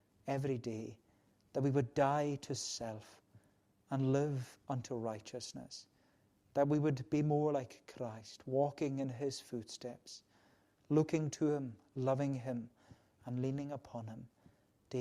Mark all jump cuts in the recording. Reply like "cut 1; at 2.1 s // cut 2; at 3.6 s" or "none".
cut 1; at 13.2 s